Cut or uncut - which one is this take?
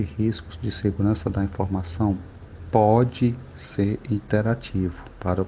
uncut